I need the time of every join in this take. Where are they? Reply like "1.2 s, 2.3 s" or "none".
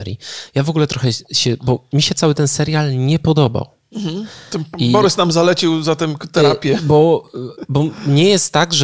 none